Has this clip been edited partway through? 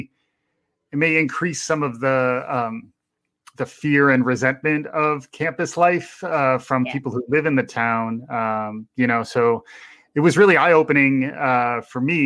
no; 0 cuts

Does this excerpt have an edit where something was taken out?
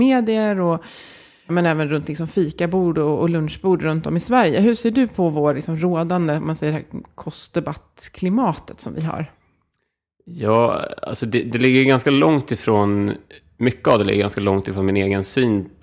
yes; 1 cut; at 1.5 s

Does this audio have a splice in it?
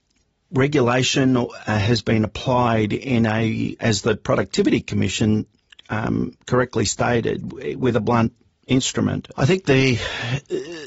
yes; 2 cuts; at 3.8 s, 9.3 s

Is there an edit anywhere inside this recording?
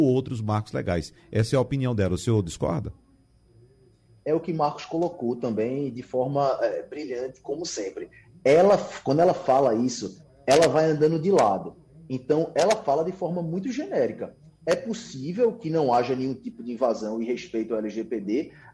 no; 0 cuts

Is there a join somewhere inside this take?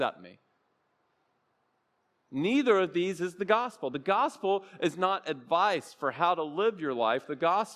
no; 0 cuts

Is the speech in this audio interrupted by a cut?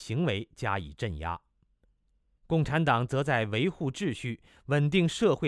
yes; 1 cut; at 2.4 s

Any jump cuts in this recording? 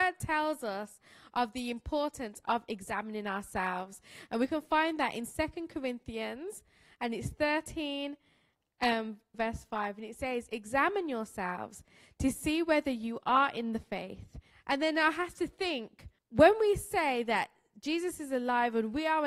yes; 3 cuts; at 9.3 s, 14.5 s, 16.2 s

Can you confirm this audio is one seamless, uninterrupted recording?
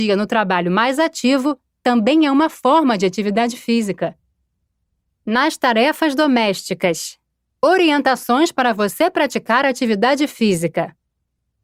no; 1 cut; at 7.5 s

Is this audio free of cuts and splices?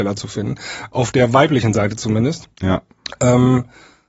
no; 1 cut; at 2.5 s

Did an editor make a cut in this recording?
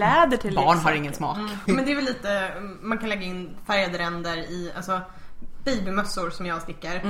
yes; 1 cut; at 1.7 s

